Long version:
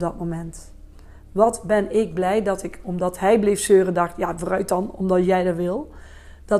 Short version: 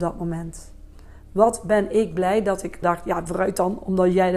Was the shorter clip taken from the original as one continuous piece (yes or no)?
no